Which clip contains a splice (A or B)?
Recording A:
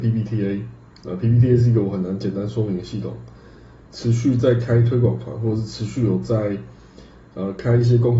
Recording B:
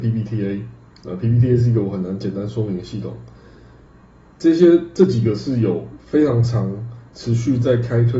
A